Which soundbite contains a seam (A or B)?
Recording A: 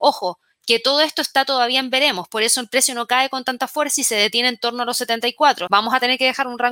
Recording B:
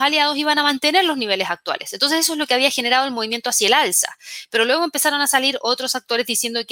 A